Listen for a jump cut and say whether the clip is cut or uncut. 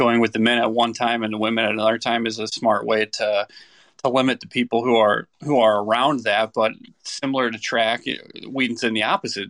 uncut